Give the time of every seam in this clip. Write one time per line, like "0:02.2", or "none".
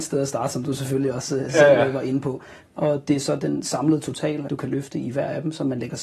0:02.6
0:04.5